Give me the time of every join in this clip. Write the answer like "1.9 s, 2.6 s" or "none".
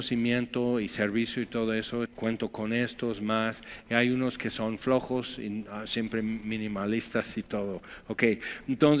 2.1 s